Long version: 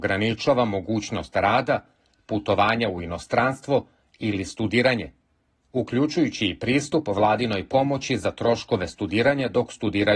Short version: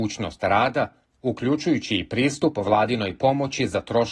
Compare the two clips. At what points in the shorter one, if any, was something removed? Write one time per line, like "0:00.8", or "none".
0:01.0